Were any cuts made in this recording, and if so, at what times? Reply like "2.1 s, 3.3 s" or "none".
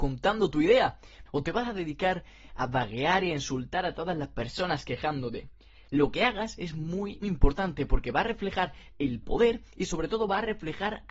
1.3 s, 7.2 s